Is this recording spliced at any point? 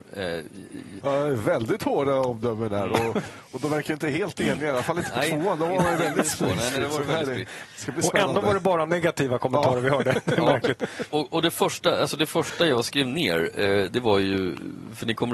yes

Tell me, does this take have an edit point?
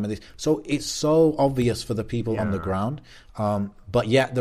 no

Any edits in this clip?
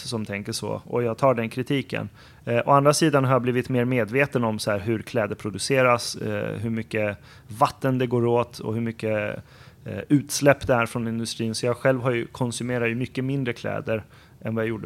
no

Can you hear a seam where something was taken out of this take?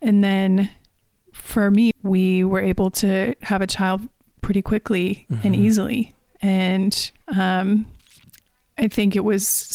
yes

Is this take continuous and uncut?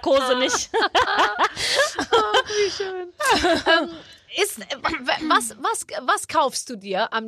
yes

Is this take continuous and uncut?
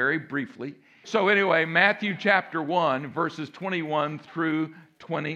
no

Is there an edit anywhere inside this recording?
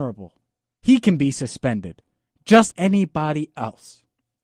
yes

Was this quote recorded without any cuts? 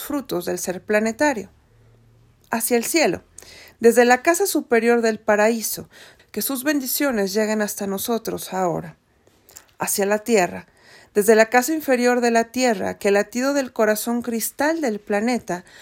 no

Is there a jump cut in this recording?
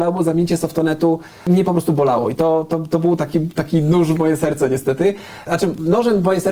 no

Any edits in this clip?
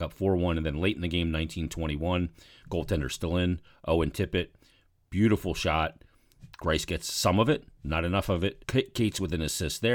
yes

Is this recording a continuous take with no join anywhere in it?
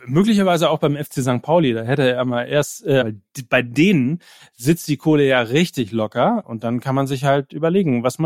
no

